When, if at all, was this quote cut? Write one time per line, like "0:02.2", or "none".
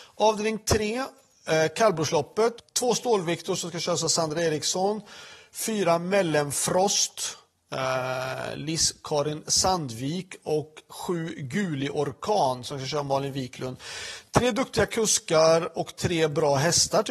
none